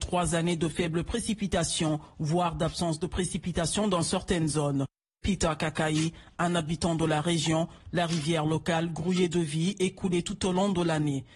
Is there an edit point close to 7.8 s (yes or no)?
yes